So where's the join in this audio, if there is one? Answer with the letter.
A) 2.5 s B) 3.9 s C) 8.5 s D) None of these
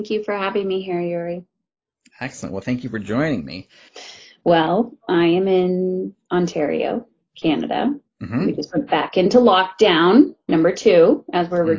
B